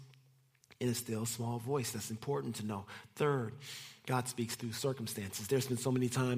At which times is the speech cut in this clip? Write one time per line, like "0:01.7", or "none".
none